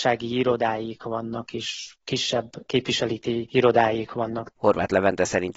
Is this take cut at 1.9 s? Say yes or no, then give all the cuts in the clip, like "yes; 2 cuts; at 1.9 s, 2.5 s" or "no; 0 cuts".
no; 1 cut; at 4.5 s